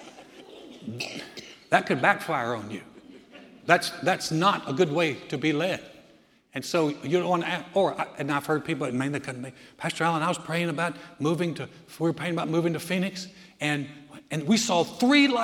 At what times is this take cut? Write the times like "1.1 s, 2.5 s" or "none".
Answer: none